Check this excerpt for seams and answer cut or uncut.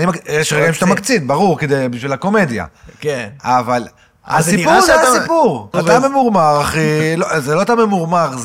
cut